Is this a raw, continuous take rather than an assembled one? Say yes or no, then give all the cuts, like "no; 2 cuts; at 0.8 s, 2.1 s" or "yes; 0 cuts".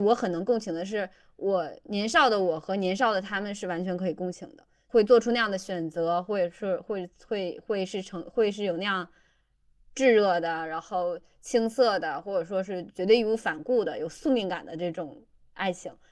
yes; 0 cuts